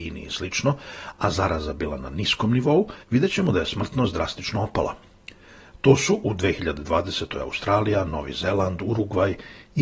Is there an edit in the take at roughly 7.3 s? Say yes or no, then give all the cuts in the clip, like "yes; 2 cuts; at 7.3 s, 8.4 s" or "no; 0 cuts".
no; 1 cut; at 3.0 s